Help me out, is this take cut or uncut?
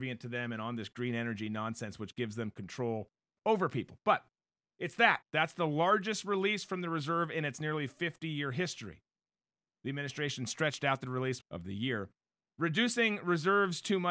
cut